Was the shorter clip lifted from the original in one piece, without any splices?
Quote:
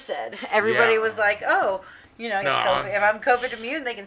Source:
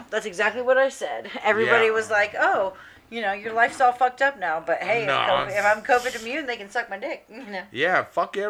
no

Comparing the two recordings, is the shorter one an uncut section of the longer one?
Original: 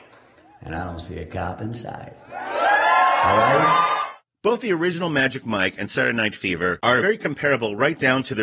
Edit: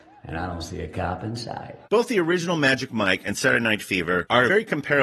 no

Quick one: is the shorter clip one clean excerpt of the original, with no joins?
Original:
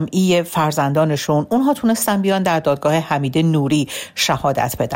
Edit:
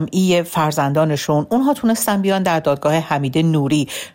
yes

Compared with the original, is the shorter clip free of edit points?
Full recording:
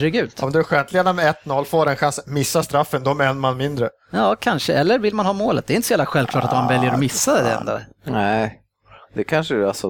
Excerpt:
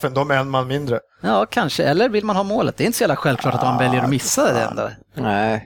yes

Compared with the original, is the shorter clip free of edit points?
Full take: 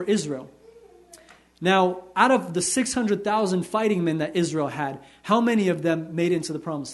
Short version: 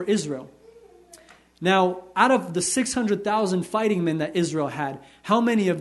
yes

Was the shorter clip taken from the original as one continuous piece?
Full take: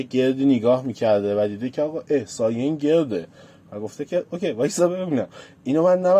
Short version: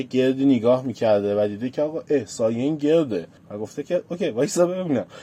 no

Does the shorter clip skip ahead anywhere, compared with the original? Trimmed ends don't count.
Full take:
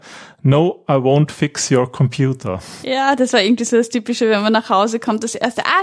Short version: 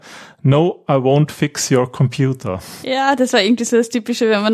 no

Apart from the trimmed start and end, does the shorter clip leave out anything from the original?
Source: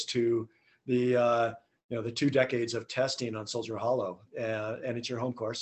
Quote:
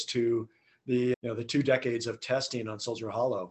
yes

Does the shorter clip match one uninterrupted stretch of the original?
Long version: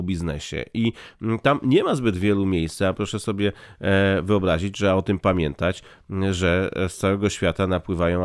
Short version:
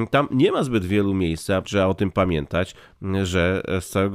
no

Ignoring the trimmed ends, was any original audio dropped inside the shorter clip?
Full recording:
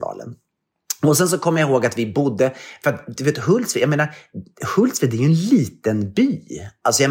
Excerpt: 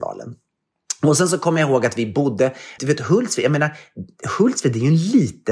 yes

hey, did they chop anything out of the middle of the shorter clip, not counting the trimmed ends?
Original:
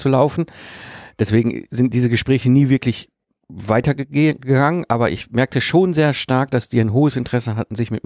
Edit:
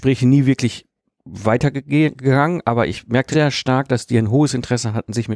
yes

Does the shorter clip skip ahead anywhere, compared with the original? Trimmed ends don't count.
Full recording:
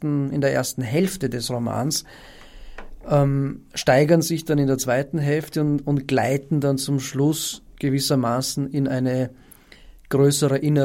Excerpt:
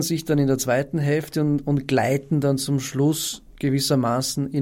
no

